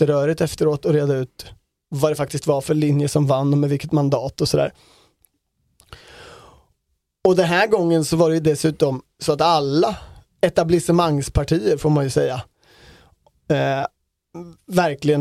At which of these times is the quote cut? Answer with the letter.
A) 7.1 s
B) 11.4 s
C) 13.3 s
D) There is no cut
D